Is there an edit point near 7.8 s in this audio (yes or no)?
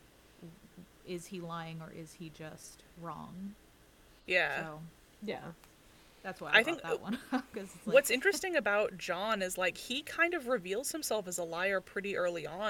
no